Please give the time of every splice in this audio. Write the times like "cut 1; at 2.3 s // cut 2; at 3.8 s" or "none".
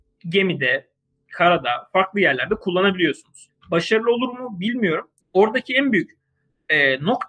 cut 1; at 3.5 s // cut 2; at 5.2 s

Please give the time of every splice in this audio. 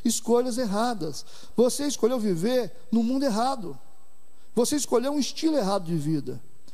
cut 1; at 1.5 s

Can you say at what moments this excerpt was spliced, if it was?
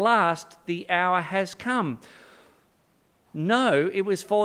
cut 1; at 3.3 s

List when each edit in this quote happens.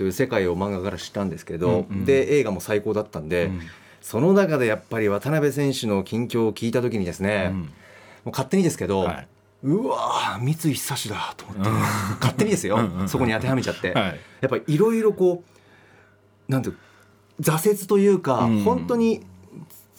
none

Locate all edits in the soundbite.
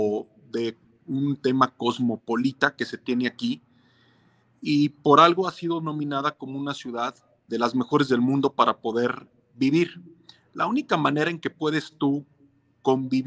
cut 1; at 7.5 s

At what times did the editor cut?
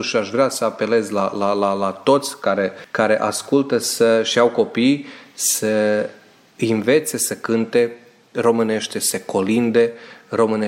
none

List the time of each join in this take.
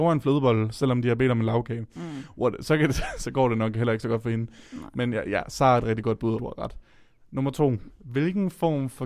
cut 1; at 6.4 s // cut 2; at 7.9 s

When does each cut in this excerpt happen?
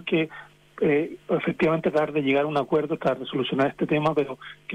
none

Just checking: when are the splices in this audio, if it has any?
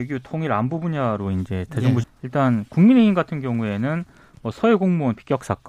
cut 1; at 2.0 s

